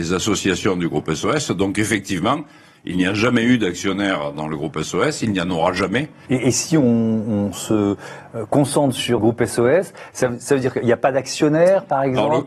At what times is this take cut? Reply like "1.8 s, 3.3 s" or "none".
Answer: 6.3 s, 9.2 s